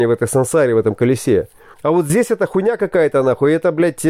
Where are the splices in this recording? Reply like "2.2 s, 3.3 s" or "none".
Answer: 1.7 s